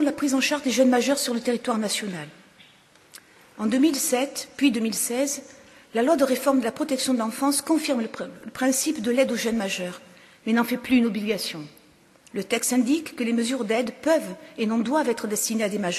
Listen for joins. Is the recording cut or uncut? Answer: uncut